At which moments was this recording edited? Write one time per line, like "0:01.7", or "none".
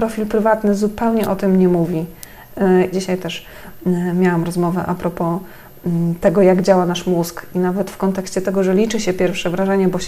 0:02.9